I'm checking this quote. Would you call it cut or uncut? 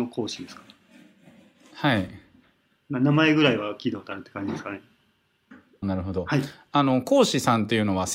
cut